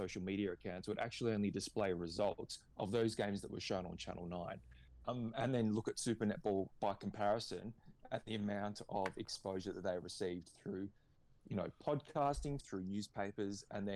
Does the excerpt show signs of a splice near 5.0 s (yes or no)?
yes